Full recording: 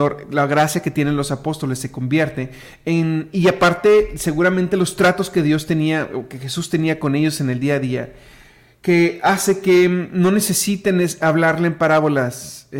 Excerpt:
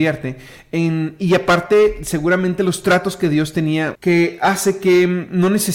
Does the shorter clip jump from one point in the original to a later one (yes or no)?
yes